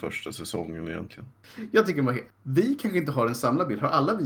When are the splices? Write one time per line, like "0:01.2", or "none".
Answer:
0:02.3